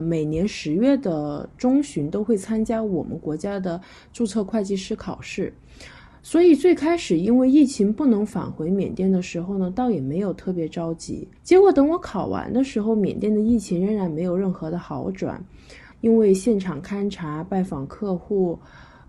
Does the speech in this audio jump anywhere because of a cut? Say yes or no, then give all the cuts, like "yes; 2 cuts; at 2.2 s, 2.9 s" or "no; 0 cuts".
yes; 2 cuts; at 11.4 s, 15.9 s